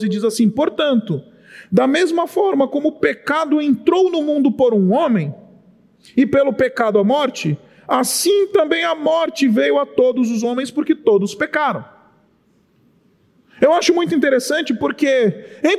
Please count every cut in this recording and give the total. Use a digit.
0